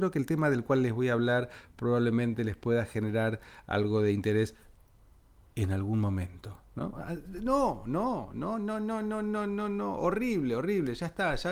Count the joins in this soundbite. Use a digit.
0